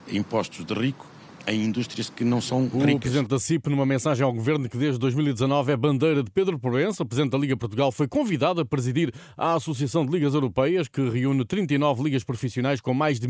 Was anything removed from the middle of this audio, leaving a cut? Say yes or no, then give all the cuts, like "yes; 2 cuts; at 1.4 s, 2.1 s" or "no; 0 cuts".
no; 0 cuts